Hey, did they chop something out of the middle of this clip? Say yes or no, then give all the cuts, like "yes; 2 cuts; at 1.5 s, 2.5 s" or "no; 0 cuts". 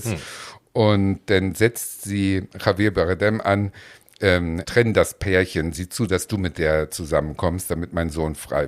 yes; 1 cut; at 4.6 s